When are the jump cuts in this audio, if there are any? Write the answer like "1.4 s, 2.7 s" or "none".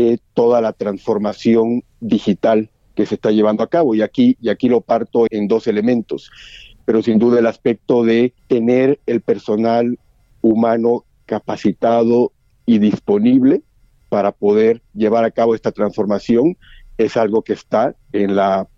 5.3 s, 6.8 s, 8.4 s